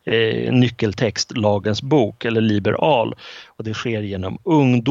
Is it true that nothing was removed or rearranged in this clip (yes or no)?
no